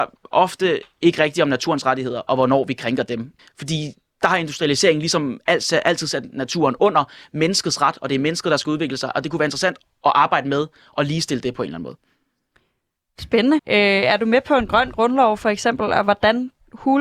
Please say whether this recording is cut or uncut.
cut